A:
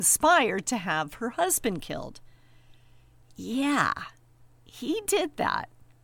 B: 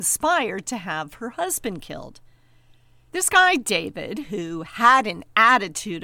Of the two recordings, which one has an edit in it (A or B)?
B